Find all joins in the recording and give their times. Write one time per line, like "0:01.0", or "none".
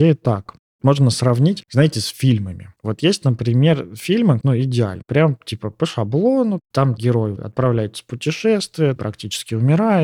0:04.4
0:09.0